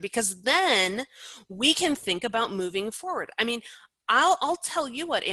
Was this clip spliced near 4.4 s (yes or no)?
no